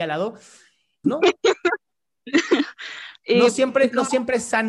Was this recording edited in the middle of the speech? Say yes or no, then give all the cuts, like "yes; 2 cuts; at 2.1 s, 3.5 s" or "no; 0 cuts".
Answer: yes; 1 cut; at 1.0 s